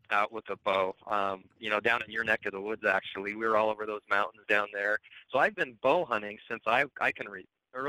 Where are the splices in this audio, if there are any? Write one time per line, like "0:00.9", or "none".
none

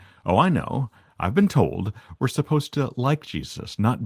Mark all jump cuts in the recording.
none

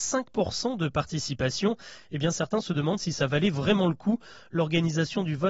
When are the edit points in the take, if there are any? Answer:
none

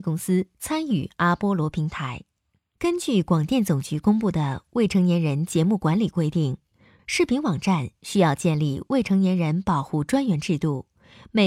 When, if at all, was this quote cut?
0:02.8

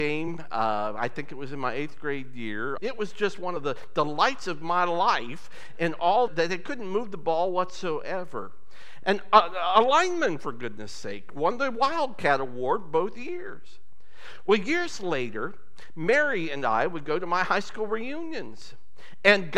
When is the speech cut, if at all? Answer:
0:02.8
0:06.3
0:09.0

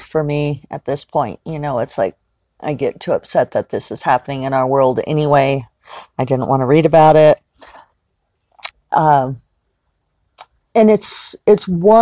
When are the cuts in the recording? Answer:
0:08.7

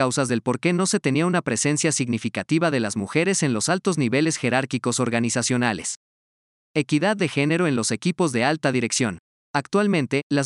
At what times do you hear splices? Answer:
none

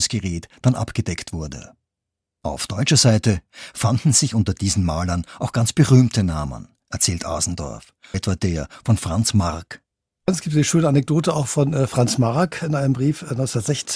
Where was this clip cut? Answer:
0:08.1

